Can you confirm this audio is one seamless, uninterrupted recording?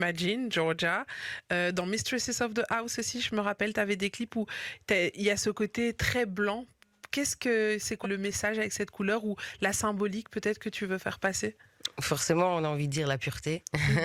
no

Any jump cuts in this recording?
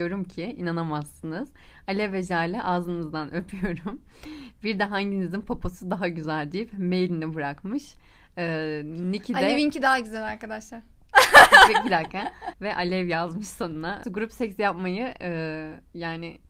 yes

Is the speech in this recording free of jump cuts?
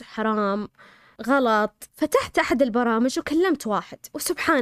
no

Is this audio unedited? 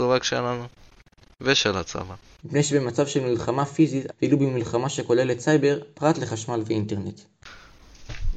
no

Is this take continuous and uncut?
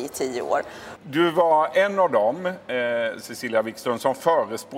no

